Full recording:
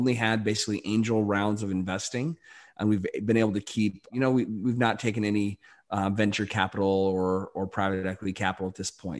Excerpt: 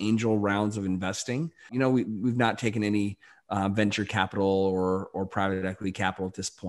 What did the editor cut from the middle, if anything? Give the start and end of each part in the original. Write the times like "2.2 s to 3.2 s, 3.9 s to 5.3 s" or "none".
2.5 s to 4.1 s